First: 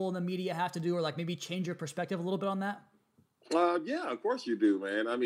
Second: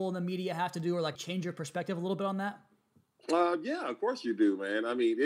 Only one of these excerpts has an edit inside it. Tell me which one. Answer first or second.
second